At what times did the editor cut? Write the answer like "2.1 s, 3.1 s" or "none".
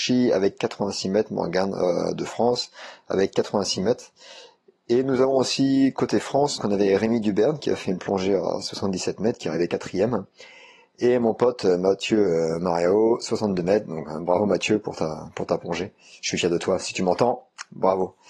6.6 s